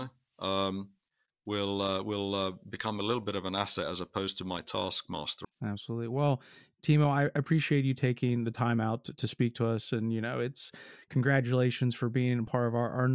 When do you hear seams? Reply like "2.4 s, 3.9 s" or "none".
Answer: 5.4 s